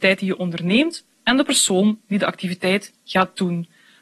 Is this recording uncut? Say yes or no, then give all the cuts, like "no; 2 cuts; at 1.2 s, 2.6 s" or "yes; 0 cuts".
yes; 0 cuts